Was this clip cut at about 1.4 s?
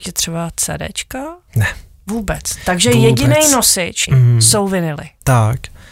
no; 1 cut; at 4.1 s

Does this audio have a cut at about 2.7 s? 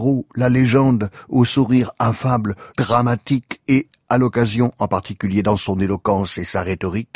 yes; 1 cut; at 2.7 s

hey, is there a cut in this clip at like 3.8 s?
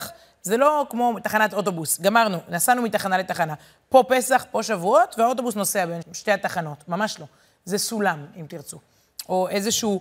no; 1 cut; at 6.0 s

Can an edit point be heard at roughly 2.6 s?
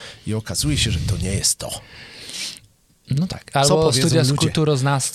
no; 0 cuts

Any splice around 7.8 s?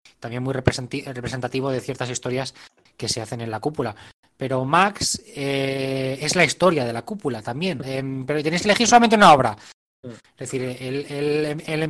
yes; 2 cuts; at 7.8 s, 10.0 s

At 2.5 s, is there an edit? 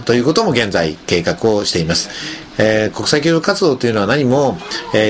yes; 1 cut; at 2.5 s

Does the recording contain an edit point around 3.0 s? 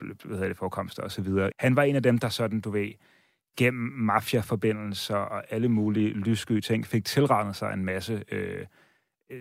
no; 1 cut; at 1.5 s

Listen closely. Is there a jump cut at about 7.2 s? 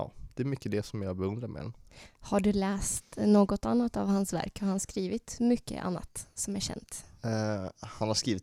no; 0 cuts

